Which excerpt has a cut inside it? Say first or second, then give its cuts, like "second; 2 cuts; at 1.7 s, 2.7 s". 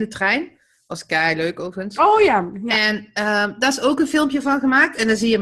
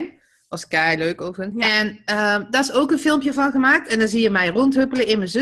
second; 1 cut; at 1.5 s